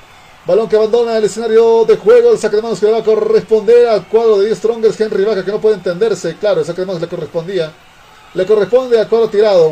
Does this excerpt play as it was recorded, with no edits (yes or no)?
yes